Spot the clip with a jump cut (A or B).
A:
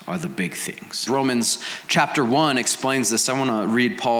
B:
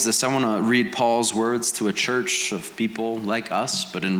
A